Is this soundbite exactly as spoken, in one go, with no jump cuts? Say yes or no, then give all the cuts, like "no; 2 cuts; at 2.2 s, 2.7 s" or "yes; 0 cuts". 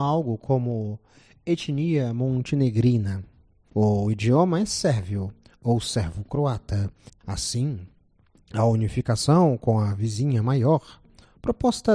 no; 1 cut; at 7.1 s